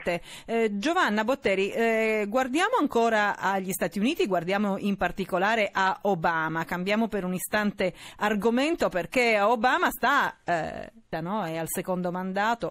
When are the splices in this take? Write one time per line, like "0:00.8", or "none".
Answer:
0:11.1